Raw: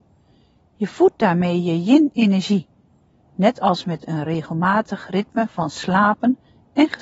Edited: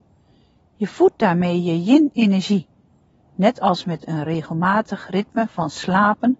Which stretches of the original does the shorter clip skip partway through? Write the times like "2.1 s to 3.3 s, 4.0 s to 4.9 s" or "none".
none

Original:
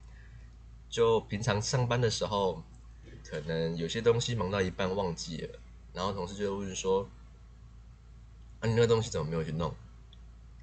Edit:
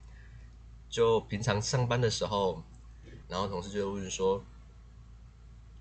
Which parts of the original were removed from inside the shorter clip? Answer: 3.2 s to 5.9 s

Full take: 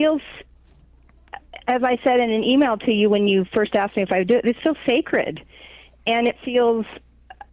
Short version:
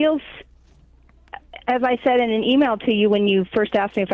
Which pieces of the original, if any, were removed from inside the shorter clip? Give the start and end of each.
none

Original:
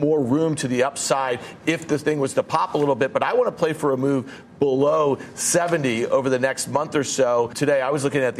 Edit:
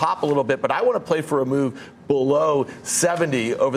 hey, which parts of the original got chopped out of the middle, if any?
none

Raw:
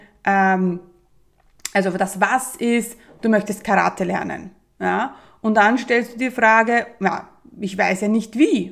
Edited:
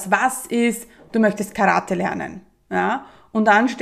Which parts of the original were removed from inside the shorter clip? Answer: none

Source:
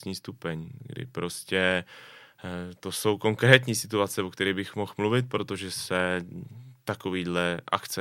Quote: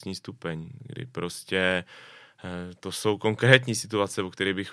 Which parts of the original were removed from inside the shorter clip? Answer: none

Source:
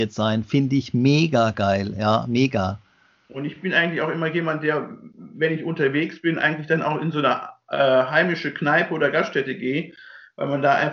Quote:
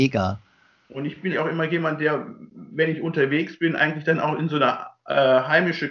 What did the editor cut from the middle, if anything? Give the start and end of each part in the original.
3.7 s to 3.9 s

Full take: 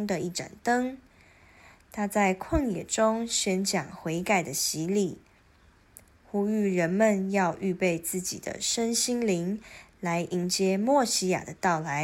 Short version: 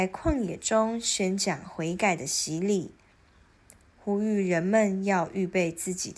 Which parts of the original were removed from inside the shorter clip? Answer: none

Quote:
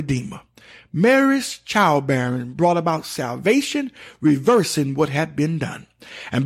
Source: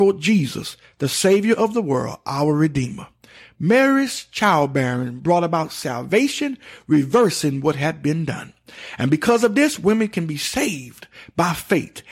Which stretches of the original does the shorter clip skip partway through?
none

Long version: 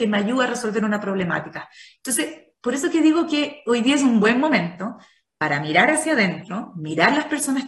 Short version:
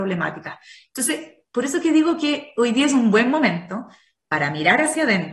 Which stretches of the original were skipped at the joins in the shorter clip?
none

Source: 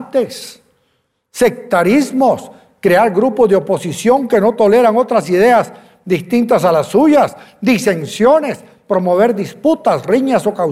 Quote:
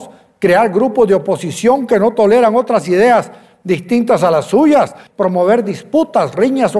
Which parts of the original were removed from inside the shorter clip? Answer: 7.5 s to 8.8 s

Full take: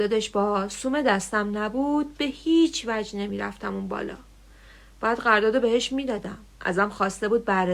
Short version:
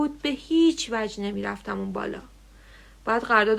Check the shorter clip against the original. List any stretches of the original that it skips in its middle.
none

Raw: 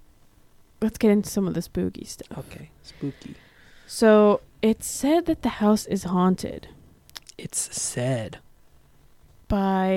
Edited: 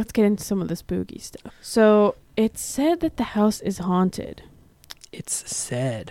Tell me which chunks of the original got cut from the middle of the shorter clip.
2.3 s to 3.7 s

